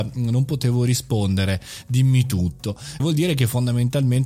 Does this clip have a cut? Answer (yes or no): yes